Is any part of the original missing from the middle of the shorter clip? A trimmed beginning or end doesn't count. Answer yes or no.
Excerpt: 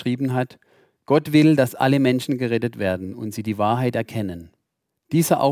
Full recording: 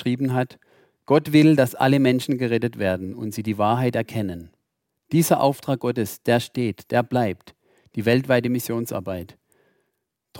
no